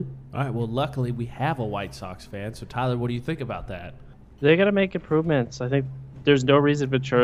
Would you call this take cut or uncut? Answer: uncut